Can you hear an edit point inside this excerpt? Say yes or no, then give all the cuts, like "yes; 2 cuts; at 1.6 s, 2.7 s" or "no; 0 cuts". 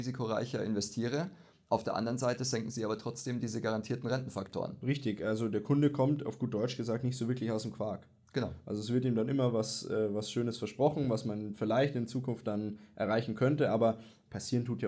no; 0 cuts